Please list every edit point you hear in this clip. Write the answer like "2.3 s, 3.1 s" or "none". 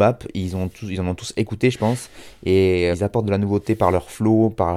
2.9 s